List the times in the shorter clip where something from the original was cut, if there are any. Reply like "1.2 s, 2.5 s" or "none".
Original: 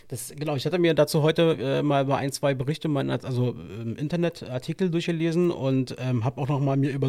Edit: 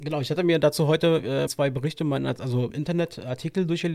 1.5 s, 2.7 s